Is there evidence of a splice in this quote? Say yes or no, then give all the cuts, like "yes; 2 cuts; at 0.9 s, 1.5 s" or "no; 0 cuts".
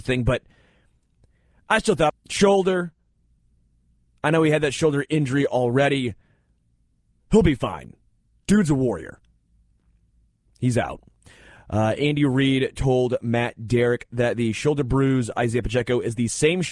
yes; 1 cut; at 2.1 s